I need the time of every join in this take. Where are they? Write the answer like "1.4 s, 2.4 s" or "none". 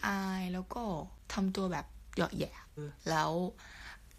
2.8 s